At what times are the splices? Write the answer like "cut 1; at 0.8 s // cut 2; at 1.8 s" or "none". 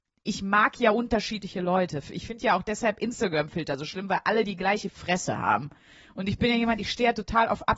none